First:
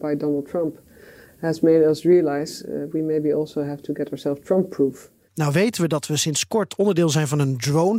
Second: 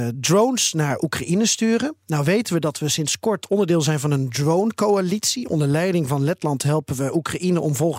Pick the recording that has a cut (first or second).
first